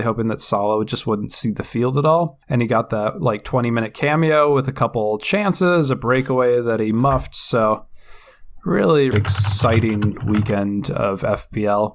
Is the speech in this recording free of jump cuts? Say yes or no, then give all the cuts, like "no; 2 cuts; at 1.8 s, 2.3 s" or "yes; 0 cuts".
no; 2 cuts; at 2.4 s, 9.1 s